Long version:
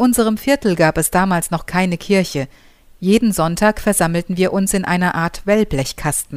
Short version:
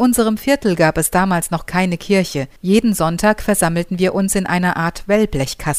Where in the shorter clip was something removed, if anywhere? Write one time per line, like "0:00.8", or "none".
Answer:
0:02.6